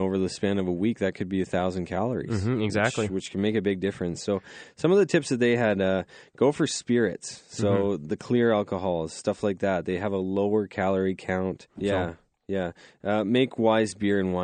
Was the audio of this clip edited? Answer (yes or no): yes